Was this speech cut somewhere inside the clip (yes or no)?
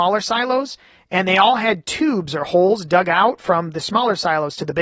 no